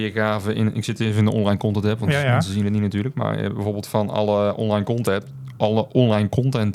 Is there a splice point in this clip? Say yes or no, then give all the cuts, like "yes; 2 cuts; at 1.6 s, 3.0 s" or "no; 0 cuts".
no; 0 cuts